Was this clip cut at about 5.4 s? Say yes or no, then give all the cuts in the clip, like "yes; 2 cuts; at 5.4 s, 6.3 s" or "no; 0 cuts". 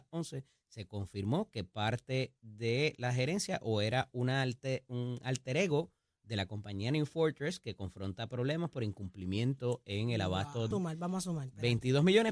no; 1 cut; at 10.7 s